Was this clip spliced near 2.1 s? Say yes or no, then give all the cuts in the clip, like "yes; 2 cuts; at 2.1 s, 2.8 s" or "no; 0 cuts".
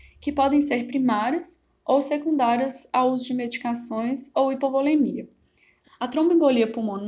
no; 1 cut; at 5.8 s